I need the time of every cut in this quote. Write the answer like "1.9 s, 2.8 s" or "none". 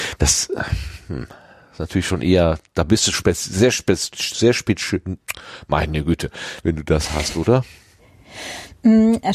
3.1 s, 6.6 s